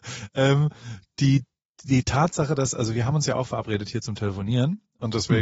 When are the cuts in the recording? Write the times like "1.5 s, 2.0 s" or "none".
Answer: none

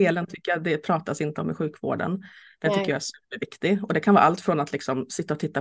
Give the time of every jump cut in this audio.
none

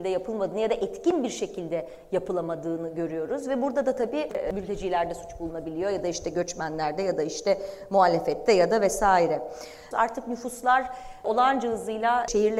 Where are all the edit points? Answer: 9.9 s

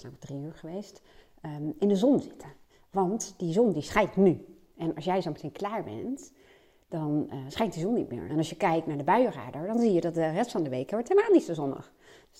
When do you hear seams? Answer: 8.3 s

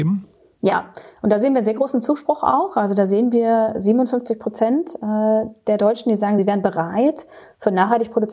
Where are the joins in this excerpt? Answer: none

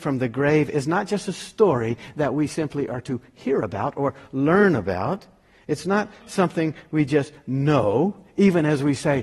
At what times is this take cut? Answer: none

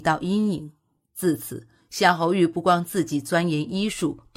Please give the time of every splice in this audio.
none

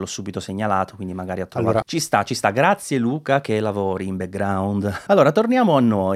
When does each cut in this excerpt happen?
1.8 s, 5.1 s

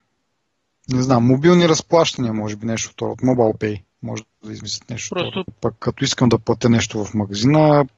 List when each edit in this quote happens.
5.5 s

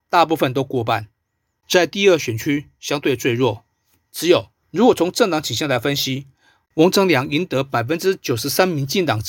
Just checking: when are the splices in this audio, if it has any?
4.6 s

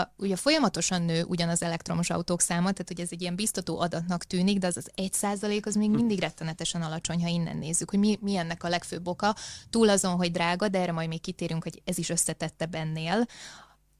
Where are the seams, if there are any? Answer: none

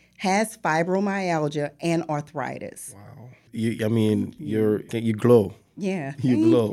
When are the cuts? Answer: 3.5 s, 4.9 s

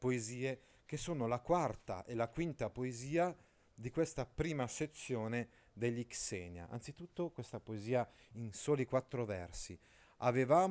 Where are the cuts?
none

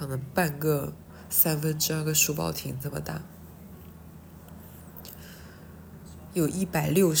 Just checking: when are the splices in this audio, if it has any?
none

